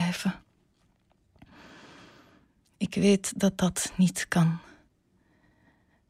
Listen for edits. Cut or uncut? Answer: uncut